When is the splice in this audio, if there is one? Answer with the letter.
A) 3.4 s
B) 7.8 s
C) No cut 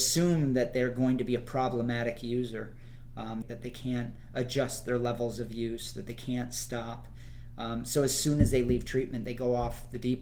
A